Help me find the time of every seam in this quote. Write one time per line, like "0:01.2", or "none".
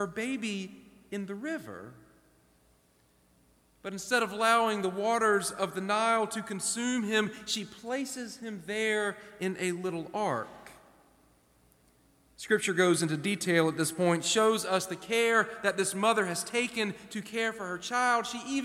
none